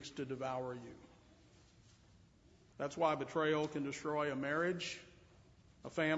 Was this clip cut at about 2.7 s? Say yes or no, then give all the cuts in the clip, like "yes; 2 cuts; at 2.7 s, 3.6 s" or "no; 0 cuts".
yes; 1 cut; at 2.7 s